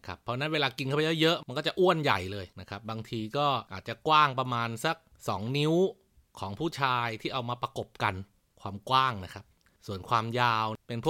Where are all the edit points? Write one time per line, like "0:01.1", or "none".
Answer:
none